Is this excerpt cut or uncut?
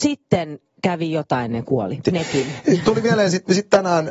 cut